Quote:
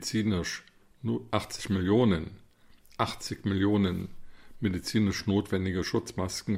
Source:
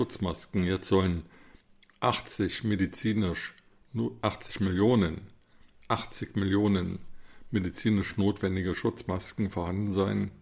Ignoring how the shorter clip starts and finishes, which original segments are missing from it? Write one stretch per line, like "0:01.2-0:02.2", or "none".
none